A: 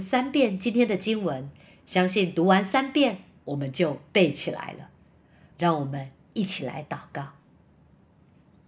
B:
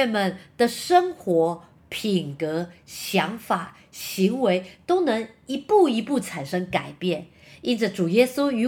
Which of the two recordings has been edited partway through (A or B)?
A